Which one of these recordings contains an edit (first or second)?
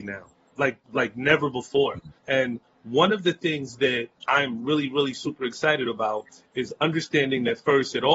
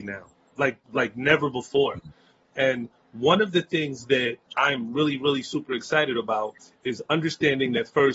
first